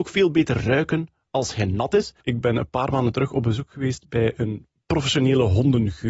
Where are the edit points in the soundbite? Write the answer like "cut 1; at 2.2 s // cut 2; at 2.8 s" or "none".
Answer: cut 1; at 2.2 s